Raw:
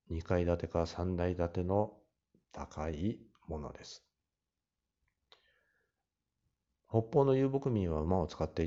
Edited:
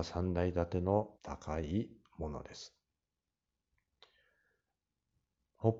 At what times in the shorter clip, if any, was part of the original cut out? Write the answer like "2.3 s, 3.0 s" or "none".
1.1 s